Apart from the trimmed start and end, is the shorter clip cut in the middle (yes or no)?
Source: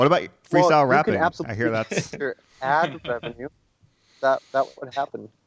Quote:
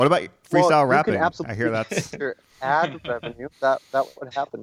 yes